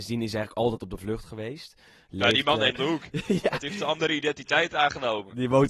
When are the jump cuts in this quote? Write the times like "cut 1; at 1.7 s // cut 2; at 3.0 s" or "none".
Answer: cut 1; at 2.7 s